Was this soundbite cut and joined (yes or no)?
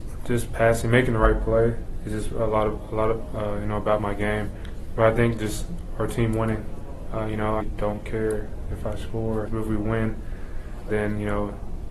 yes